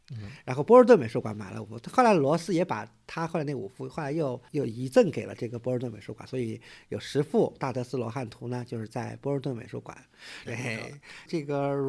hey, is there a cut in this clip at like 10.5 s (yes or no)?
yes